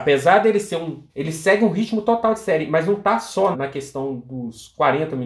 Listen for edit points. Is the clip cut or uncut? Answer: cut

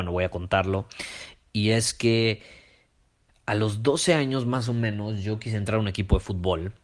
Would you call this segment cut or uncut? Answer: uncut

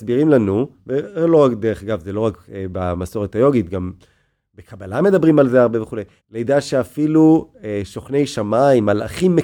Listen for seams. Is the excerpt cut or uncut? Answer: cut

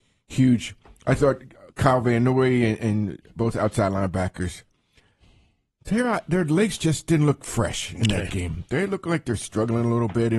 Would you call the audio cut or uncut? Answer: cut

